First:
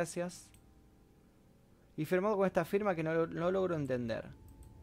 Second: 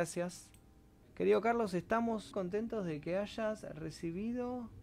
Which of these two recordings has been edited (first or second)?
second